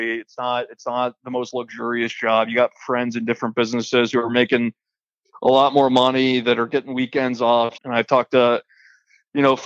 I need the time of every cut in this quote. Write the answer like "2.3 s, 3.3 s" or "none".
7.8 s